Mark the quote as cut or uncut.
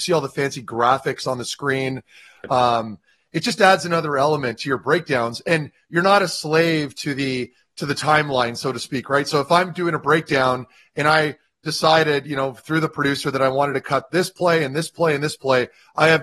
uncut